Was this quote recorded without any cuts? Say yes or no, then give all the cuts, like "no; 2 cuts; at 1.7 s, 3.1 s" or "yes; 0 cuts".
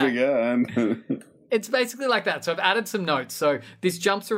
yes; 0 cuts